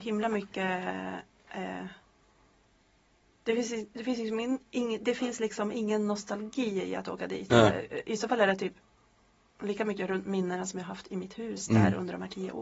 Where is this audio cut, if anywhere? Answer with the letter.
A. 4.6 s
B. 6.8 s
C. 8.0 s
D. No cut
D